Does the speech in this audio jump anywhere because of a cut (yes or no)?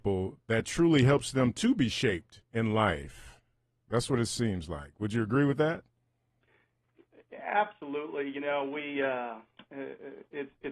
yes